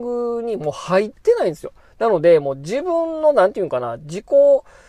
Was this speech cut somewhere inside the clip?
no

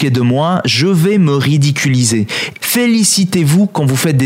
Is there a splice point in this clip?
yes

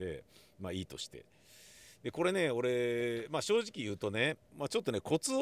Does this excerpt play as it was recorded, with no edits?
no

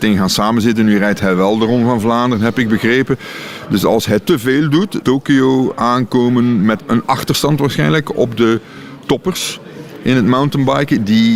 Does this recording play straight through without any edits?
no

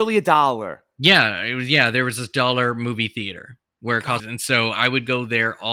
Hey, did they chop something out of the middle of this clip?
yes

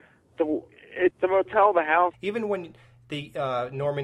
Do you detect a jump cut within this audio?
yes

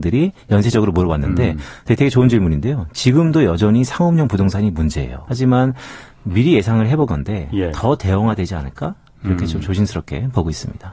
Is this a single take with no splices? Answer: no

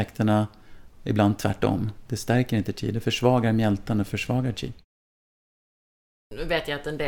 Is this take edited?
no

